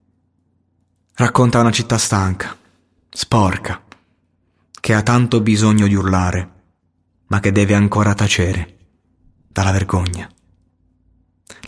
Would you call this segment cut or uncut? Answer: uncut